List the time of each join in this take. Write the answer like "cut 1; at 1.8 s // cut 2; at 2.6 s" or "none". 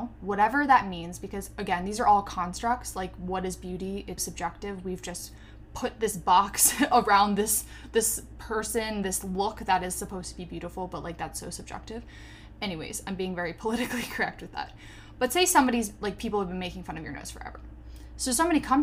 cut 1; at 4.2 s